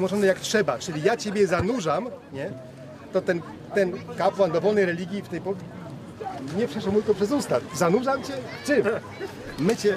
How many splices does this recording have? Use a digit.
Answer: 0